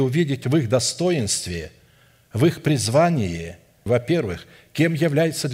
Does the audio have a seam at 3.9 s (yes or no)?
yes